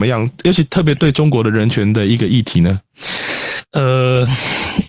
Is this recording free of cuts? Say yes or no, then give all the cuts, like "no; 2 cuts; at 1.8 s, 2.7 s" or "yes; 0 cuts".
yes; 0 cuts